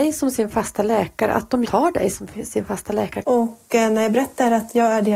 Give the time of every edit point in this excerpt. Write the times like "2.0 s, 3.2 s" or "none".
1.6 s, 3.2 s